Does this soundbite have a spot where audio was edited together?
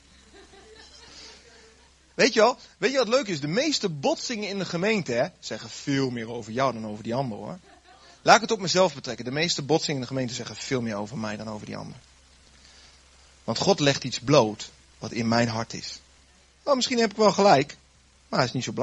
no; 0 cuts

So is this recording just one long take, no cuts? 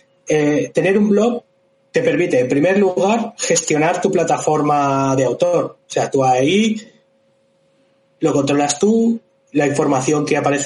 yes; 0 cuts

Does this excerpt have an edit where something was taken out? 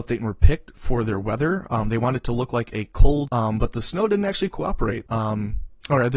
yes; 2 cuts; at 3.3 s, 5.1 s

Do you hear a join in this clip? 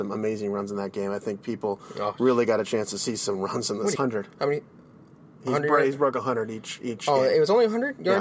yes; 1 cut; at 4.0 s

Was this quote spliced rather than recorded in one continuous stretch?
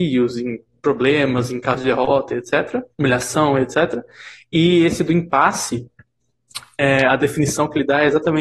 yes; 1 cut; at 2.9 s

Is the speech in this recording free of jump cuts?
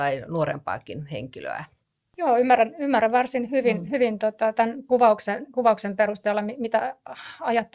yes; 0 cuts

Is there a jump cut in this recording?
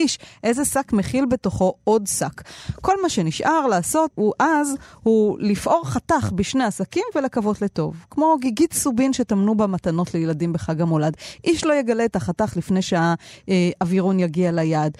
yes; 1 cut; at 4.1 s

